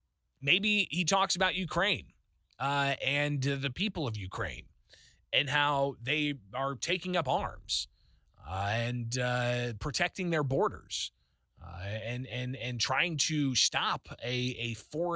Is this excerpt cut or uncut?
uncut